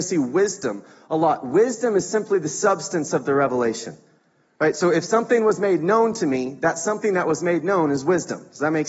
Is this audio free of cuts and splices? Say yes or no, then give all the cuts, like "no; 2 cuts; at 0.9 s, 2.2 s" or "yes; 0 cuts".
yes; 0 cuts